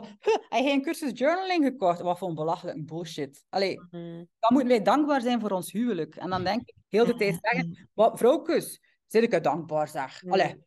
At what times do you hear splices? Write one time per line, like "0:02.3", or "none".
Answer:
0:06.8